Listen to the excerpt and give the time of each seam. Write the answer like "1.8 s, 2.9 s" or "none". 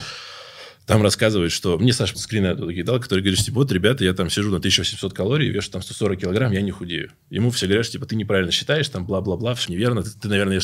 2.1 s, 9.7 s